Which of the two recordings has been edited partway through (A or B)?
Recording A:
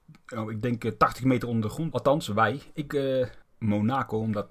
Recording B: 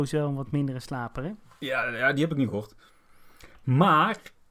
A